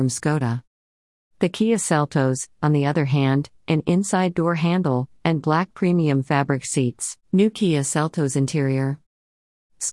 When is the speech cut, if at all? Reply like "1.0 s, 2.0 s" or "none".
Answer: 3.5 s, 5.2 s, 7.2 s